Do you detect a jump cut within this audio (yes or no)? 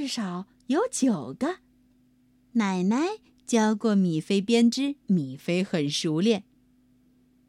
yes